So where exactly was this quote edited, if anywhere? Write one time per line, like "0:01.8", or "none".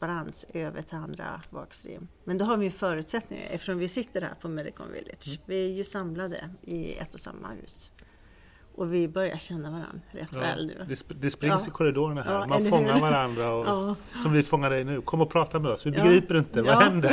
0:02.1